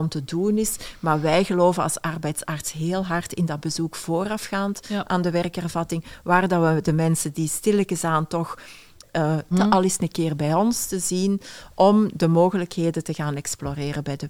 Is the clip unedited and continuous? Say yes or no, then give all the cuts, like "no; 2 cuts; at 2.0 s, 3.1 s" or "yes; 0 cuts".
no; 1 cut; at 9.5 s